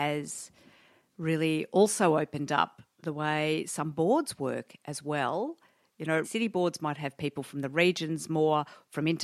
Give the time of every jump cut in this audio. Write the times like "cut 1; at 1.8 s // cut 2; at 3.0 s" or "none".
cut 1; at 6.2 s